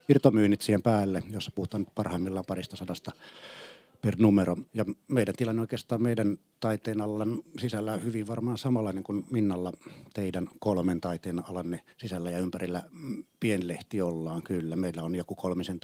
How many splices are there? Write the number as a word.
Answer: two